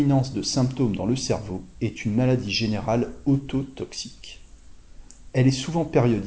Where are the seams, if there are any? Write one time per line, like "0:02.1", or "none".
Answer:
none